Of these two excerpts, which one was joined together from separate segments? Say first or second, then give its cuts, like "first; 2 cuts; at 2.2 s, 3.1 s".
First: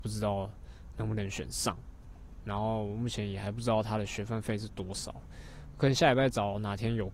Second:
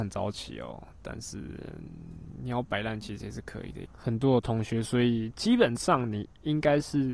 second; 1 cut; at 3.9 s